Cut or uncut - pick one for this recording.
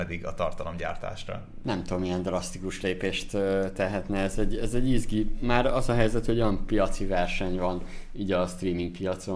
uncut